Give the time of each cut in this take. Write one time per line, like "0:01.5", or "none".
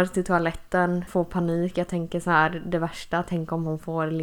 0:01.1